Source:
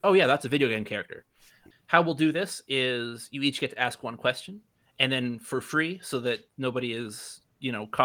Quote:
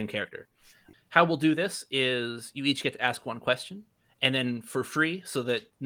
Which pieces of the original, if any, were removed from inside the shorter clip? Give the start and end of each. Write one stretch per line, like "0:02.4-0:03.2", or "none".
none